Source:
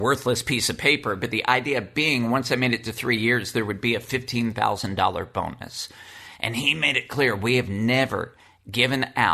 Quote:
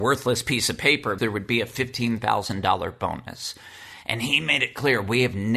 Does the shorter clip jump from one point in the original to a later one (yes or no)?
yes